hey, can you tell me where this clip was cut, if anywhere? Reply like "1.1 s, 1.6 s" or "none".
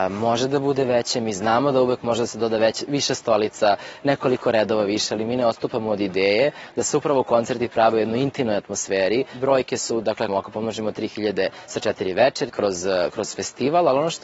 10.3 s, 12.5 s